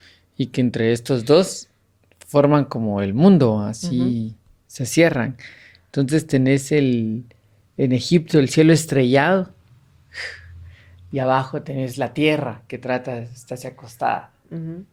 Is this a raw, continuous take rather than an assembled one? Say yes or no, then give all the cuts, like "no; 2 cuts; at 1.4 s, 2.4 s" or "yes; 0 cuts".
yes; 0 cuts